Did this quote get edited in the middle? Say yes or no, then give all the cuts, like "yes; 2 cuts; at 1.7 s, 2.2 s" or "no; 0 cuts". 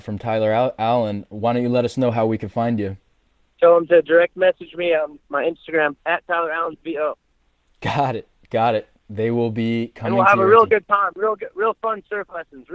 yes; 1 cut; at 6.0 s